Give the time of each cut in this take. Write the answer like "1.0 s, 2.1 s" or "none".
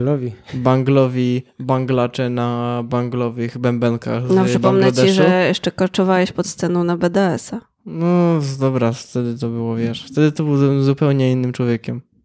none

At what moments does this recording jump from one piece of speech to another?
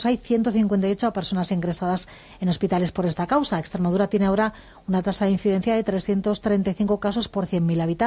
none

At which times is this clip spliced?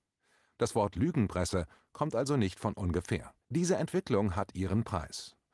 3.4 s

